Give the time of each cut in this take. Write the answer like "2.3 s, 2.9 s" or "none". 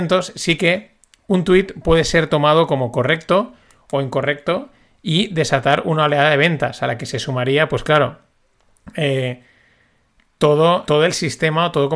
10.8 s